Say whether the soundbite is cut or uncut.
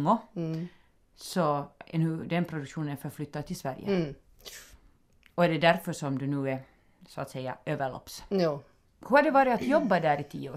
uncut